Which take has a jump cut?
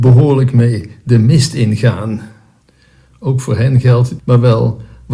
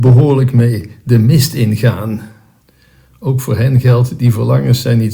first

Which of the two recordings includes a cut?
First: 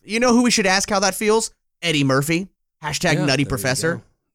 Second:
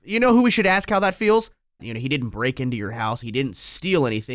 second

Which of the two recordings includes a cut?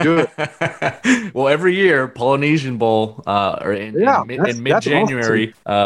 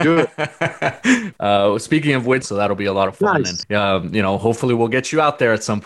second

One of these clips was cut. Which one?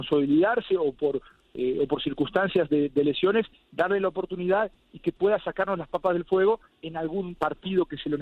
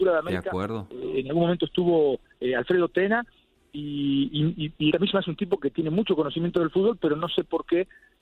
second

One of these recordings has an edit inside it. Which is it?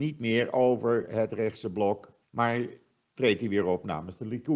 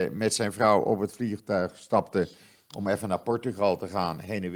first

